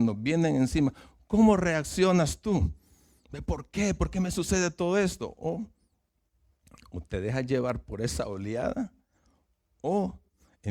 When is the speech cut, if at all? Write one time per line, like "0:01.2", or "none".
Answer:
0:03.2